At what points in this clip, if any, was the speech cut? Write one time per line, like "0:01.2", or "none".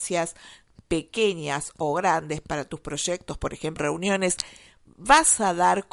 0:03.8